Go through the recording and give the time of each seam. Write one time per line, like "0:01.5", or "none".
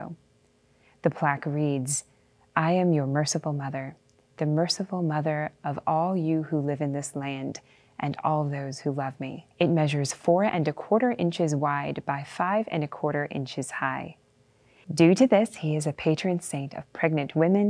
0:09.5
0:14.8